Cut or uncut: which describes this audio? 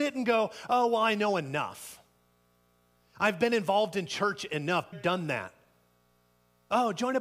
cut